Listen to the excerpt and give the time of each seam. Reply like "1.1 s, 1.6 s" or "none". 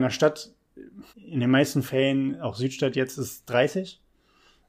1.1 s